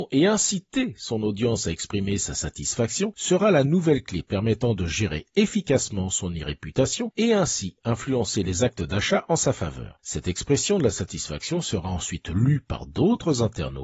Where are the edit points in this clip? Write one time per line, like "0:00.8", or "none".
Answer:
none

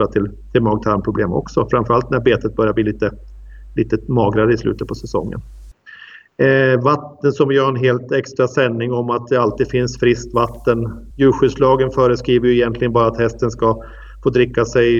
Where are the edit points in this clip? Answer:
none

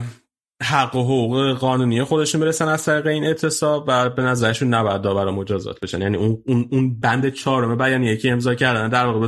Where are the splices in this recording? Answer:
0:07.0

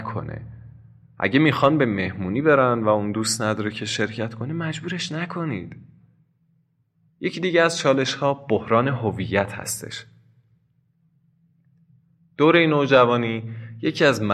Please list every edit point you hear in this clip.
none

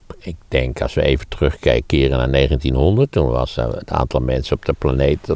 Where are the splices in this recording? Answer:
none

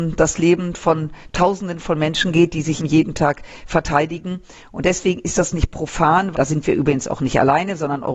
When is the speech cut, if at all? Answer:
0:02.8
0:06.3

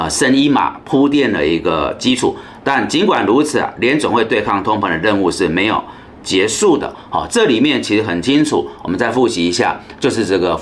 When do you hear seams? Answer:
none

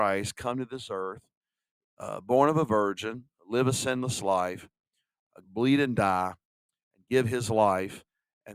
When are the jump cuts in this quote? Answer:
0:05.4

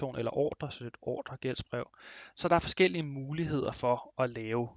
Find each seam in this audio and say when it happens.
none

